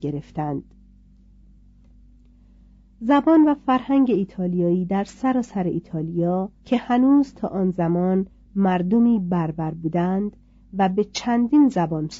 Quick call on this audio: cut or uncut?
cut